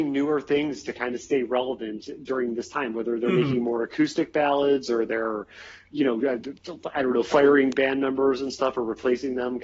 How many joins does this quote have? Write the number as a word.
zero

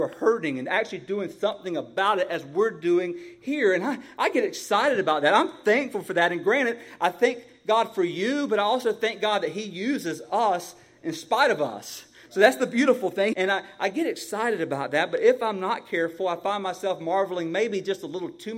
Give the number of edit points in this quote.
one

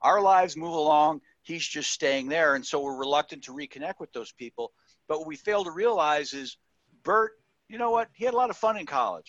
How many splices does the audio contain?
zero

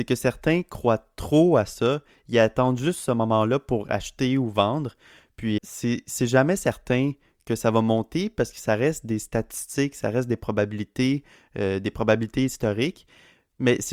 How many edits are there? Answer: one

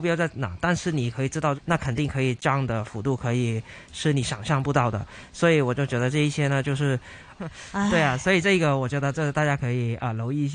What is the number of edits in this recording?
two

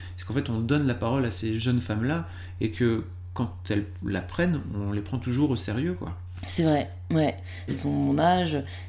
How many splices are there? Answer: one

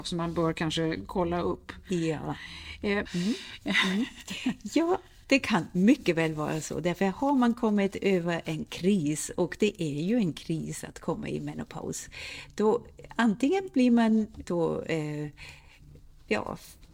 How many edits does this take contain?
two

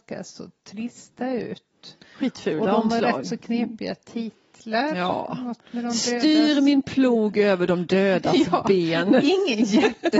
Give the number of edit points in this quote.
zero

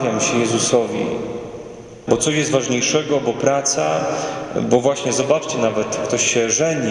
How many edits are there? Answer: one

